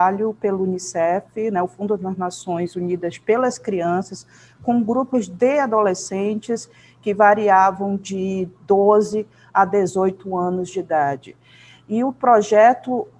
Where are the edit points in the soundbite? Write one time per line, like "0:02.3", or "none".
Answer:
none